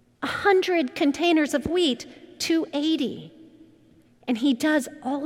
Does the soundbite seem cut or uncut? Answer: cut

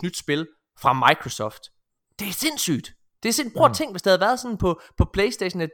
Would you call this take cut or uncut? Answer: uncut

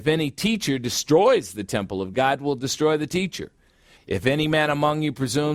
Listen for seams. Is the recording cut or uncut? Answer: cut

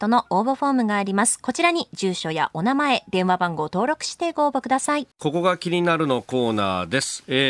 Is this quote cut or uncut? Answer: cut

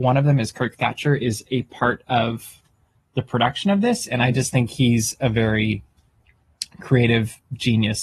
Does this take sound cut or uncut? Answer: uncut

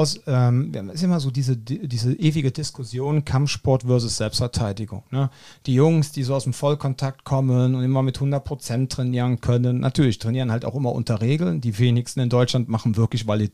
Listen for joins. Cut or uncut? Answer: uncut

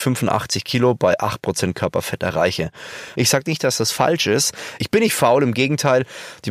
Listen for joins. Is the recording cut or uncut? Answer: cut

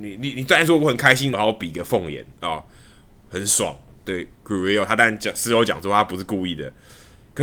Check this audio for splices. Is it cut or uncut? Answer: cut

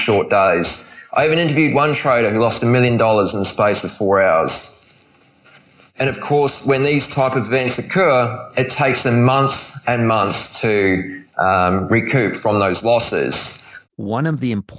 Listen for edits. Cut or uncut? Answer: cut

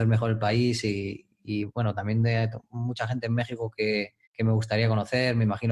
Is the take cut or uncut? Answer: cut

